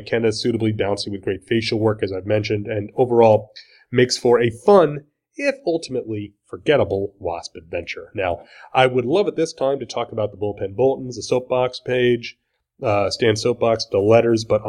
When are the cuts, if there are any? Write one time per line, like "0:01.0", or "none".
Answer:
none